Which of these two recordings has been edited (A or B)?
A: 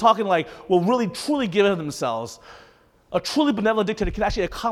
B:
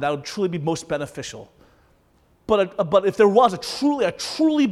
B